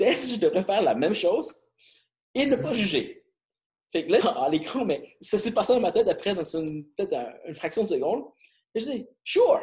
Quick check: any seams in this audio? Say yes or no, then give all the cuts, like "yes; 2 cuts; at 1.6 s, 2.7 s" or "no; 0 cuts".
yes; 1 cut; at 4.2 s